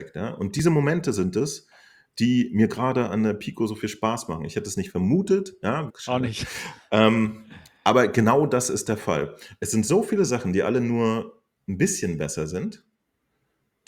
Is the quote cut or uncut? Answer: cut